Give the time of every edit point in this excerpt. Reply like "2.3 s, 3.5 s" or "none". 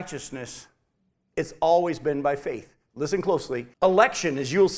3.7 s